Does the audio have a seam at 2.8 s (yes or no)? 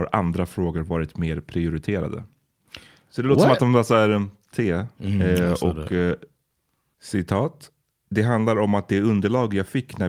no